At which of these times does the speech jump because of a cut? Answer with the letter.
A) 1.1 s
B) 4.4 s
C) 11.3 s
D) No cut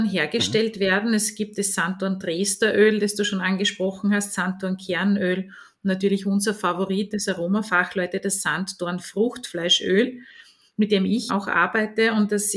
C